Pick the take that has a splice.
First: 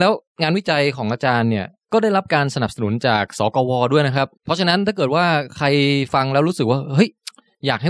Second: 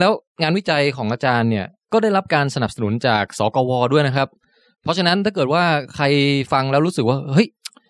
first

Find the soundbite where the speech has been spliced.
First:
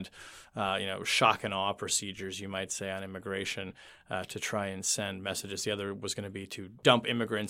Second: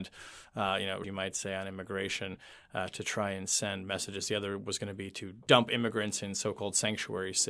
second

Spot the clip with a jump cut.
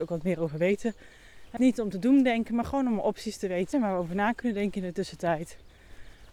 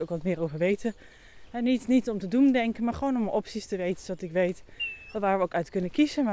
first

